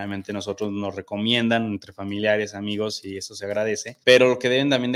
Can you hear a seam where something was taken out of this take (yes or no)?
yes